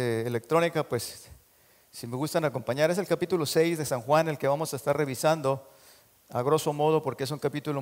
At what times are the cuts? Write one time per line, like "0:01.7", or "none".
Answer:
none

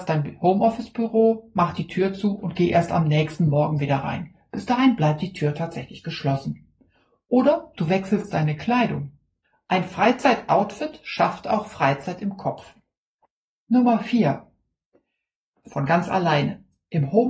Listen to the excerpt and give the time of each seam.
0:15.6

